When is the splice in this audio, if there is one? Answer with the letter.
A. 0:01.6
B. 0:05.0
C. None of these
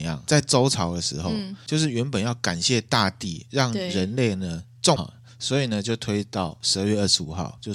B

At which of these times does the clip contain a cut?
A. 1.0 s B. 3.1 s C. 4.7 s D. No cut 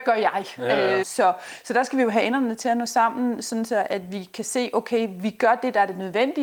A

